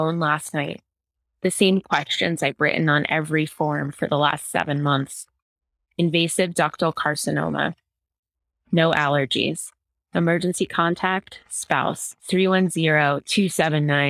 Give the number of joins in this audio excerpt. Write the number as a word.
one